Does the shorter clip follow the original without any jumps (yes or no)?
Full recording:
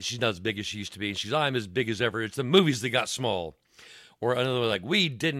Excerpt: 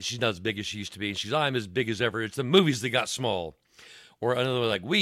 yes